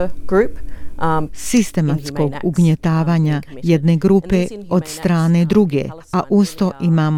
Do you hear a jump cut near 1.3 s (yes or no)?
yes